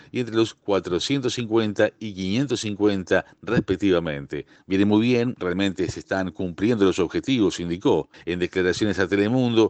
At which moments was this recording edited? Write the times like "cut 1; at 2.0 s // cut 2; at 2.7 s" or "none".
cut 1; at 4.6 s // cut 2; at 8.1 s